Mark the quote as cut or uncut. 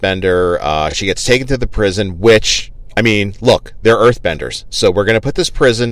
uncut